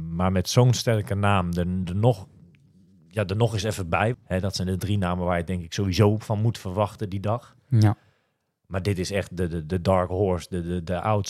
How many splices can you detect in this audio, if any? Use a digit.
2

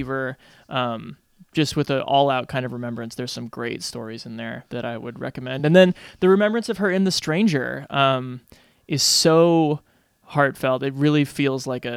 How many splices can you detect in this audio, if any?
0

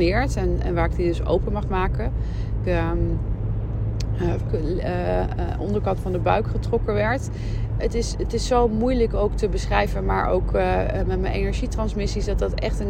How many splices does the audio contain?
3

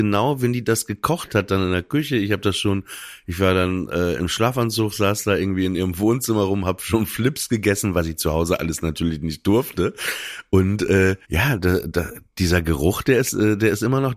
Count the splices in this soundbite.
1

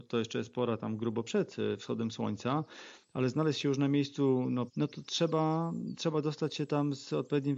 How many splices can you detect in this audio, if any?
1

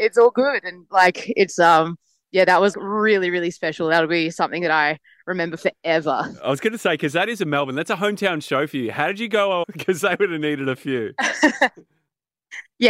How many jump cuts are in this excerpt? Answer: 2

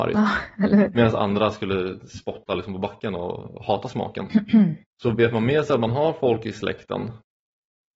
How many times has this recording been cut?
1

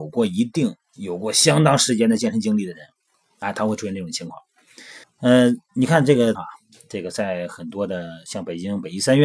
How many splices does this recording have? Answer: 2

